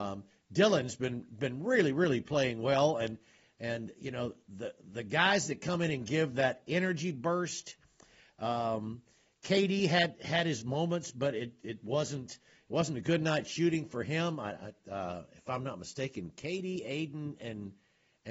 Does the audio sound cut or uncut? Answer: uncut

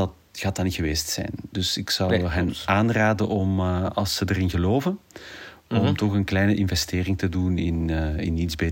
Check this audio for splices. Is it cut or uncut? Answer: uncut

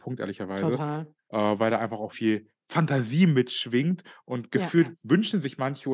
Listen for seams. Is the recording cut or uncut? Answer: cut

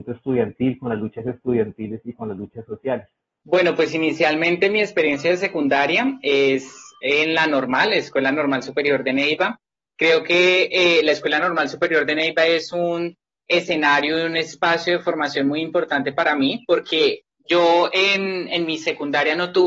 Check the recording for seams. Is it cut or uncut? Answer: uncut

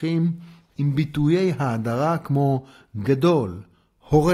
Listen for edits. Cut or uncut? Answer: uncut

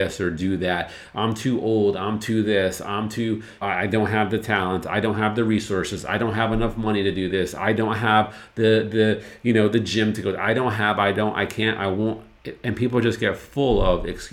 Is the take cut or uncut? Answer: cut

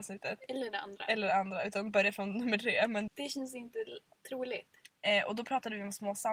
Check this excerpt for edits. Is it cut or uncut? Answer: cut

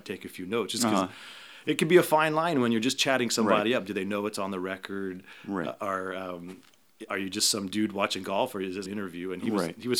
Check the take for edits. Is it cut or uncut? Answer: cut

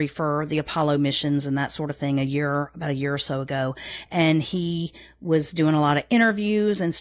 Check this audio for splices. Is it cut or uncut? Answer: uncut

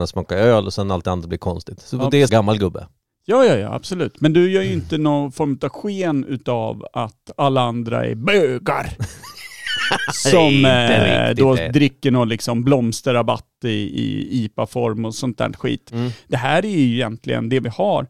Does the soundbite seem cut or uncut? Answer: cut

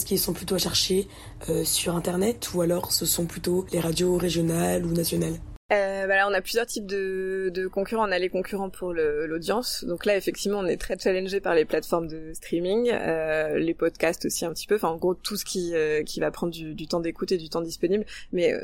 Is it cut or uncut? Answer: uncut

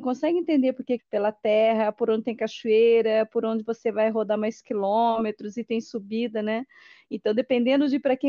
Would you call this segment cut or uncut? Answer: cut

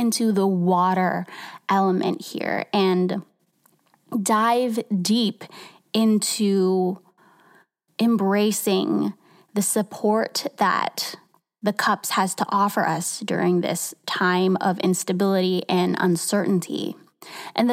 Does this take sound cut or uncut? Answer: uncut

